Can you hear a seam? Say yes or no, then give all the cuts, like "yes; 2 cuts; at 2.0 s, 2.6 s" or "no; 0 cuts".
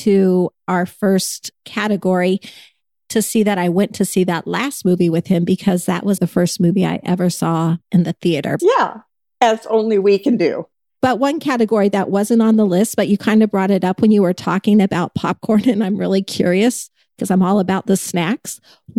yes; 2 cuts; at 6.2 s, 8.6 s